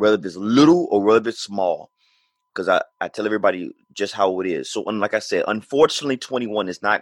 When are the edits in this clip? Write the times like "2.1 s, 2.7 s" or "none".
none